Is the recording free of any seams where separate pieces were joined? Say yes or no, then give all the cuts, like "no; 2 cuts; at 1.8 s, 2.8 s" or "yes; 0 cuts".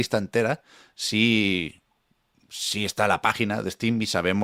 yes; 0 cuts